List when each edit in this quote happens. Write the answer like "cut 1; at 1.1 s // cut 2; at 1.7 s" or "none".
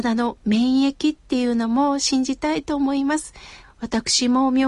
cut 1; at 3.6 s